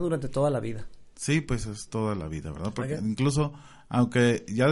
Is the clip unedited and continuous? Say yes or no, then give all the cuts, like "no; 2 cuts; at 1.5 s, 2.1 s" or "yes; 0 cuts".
yes; 0 cuts